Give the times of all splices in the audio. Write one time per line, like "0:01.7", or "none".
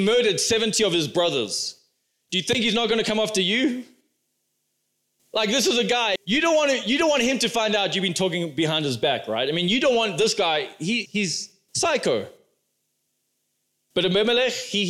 0:06.2
0:11.1

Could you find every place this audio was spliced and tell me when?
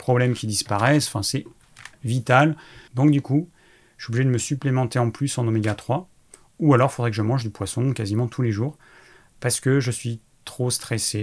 0:02.9

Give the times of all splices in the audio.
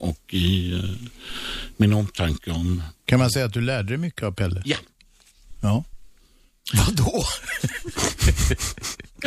none

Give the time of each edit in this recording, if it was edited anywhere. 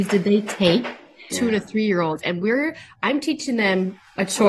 0:01.3

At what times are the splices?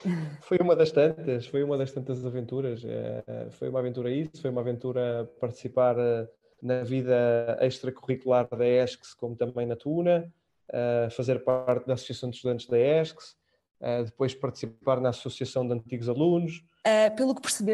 0:16.8

